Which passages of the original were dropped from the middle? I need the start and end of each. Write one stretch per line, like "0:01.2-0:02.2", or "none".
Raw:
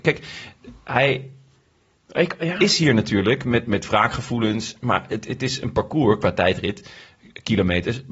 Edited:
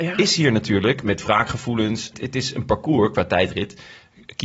0:03.4-0:03.6
0:04.8-0:05.2